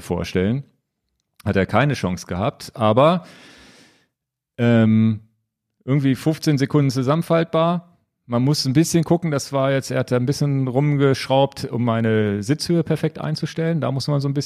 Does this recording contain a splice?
no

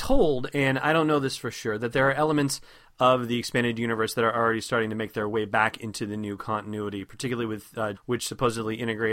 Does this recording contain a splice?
yes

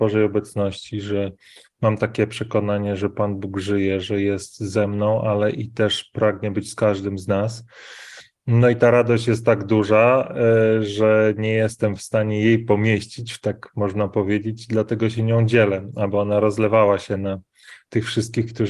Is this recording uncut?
yes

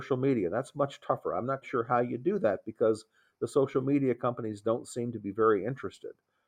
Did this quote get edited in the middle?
yes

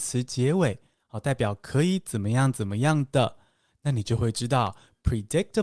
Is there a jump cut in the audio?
no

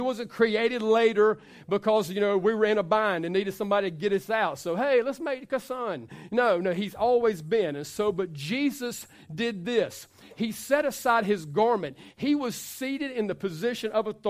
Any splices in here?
no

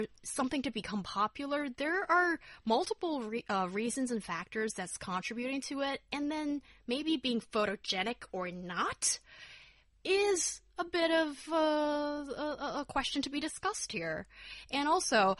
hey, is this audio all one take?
yes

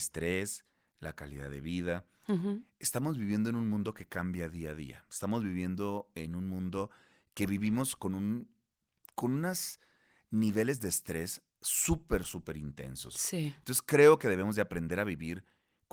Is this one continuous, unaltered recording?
no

